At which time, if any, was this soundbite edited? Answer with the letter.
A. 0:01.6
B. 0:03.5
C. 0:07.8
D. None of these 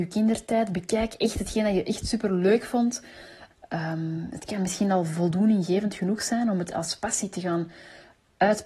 B